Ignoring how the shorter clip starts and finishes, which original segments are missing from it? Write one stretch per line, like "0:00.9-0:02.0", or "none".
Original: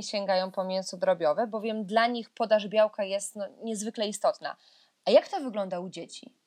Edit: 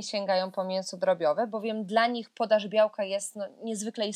none